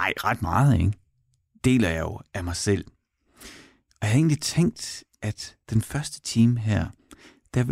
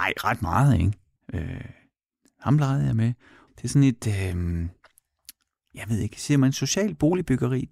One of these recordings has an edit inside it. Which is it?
second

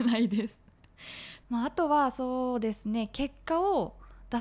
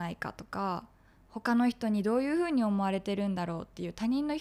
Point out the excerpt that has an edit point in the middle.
first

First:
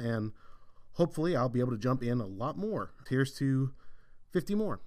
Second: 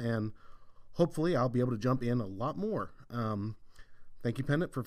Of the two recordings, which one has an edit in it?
first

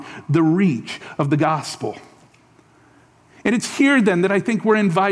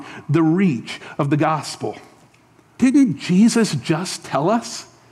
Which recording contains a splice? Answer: second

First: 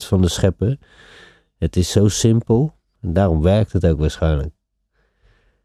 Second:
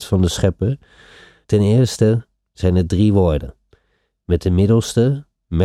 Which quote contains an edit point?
second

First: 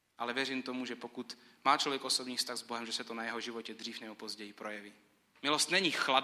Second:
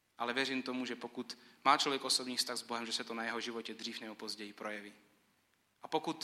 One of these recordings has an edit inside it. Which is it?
first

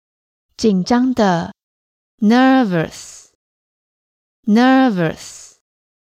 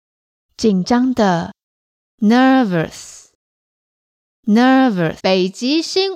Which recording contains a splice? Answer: second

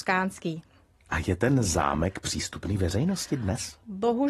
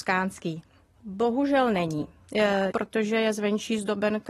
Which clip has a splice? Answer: second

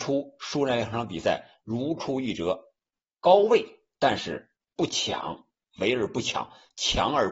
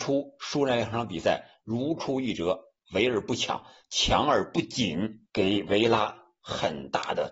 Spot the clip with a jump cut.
second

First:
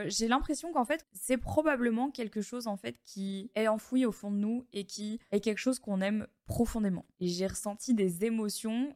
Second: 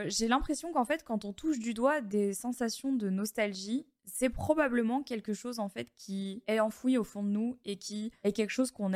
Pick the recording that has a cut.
first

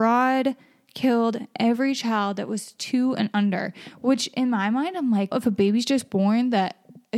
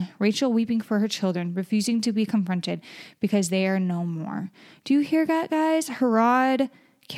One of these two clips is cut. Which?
first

